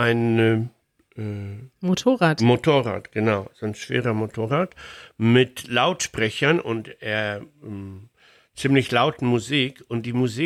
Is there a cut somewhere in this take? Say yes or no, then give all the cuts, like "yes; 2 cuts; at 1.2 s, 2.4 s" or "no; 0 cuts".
no; 0 cuts